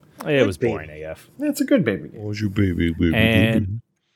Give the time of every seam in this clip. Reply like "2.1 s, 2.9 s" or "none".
1.3 s